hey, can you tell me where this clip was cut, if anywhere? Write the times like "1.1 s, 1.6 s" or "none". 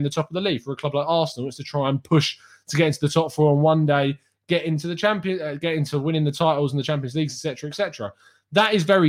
none